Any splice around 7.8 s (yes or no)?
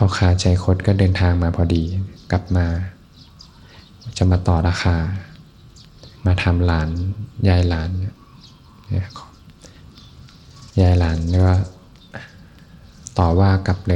no